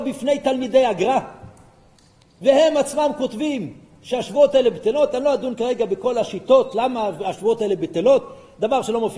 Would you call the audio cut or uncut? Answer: uncut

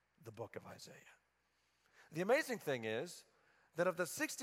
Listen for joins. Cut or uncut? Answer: uncut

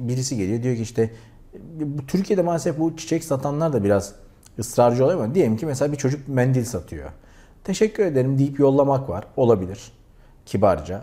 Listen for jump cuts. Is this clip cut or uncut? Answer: uncut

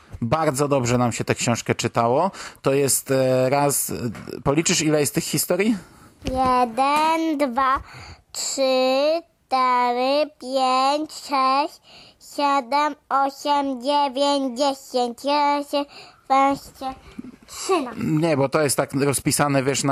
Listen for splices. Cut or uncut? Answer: uncut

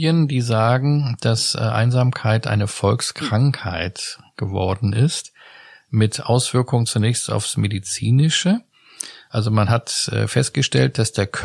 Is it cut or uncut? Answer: uncut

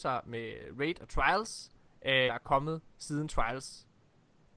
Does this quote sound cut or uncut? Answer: cut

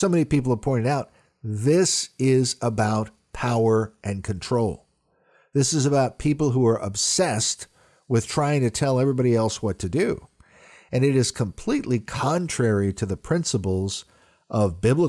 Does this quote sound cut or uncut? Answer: uncut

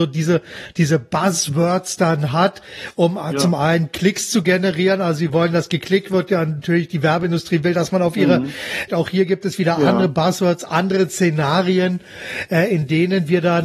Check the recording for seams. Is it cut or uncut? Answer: cut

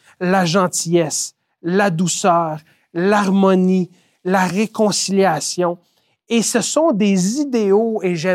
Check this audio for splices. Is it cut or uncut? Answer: uncut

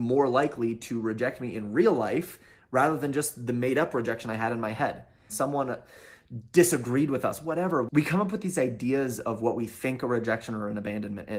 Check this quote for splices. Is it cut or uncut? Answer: cut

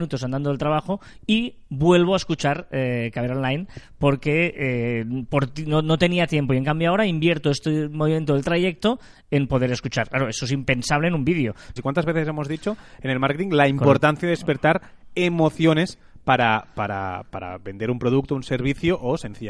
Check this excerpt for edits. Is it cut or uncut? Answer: cut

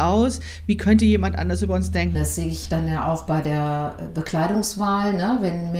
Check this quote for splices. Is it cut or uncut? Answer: cut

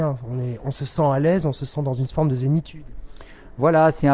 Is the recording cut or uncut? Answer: uncut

